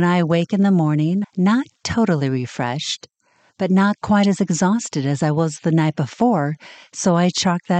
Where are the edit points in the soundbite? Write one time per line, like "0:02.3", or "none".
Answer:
0:01.2

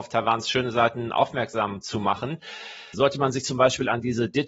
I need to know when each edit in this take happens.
0:02.9

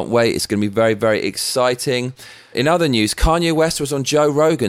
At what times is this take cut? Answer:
0:02.5

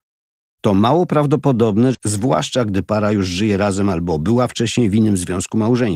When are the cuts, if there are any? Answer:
0:01.9

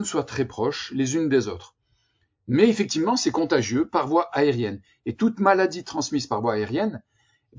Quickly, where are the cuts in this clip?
none

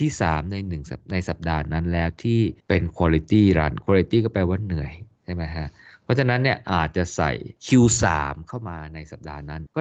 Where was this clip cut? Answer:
0:07.6

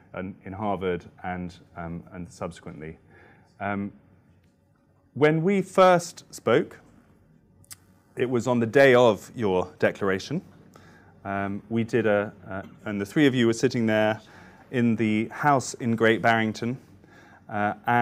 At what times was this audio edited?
0:12.8

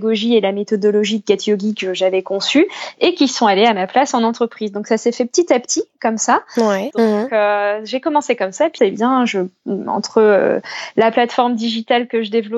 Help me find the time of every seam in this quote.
0:06.9
0:08.8

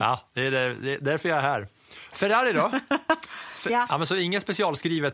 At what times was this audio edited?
0:02.1
0:03.9

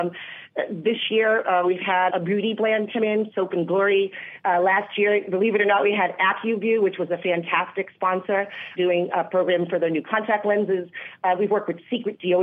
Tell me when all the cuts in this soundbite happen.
0:02.1
0:08.8

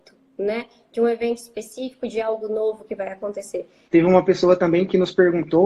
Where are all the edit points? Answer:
0:03.9

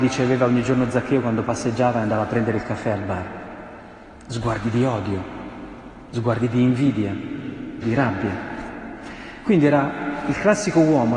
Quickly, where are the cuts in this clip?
0:07.8

